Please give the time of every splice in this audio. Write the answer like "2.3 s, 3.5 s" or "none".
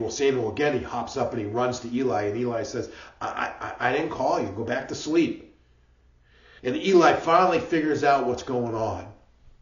6.6 s